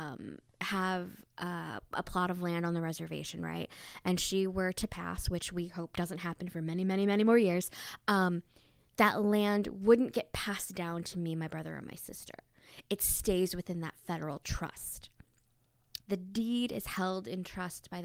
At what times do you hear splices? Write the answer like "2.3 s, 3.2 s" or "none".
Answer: 16.0 s